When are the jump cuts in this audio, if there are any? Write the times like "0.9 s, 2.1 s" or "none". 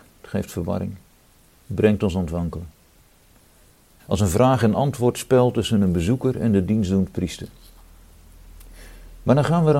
4.0 s